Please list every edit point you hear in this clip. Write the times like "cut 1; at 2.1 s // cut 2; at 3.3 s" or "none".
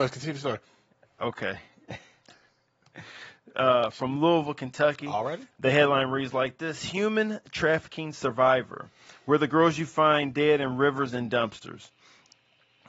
none